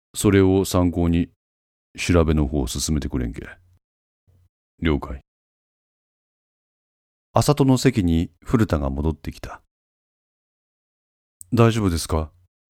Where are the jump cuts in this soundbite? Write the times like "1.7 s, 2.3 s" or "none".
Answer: none